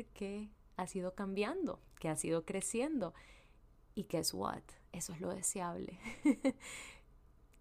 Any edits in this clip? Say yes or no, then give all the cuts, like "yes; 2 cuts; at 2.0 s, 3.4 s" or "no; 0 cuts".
no; 0 cuts